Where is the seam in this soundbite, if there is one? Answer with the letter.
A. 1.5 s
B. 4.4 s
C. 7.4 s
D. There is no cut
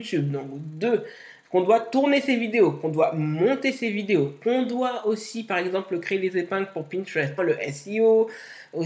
C